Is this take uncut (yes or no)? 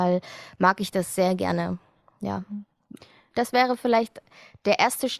no